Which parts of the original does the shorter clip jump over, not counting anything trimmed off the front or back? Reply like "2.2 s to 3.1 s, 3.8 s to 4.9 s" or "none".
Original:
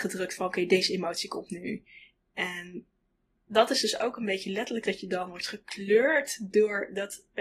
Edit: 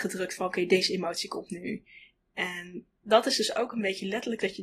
3.0 s to 3.4 s